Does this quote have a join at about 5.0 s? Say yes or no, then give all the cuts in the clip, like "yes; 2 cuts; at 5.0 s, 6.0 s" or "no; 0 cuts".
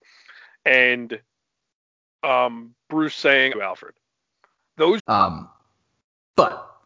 yes; 2 cuts; at 3.5 s, 5.0 s